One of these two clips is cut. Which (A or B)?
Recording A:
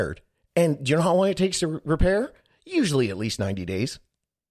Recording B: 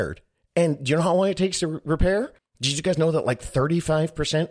B